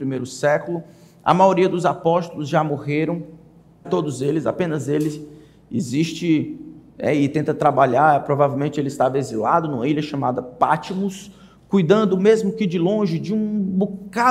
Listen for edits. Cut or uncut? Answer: cut